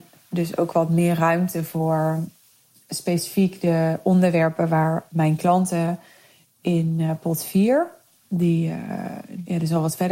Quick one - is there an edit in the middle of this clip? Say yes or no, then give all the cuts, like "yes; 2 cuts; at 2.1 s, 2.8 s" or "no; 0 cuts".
no; 0 cuts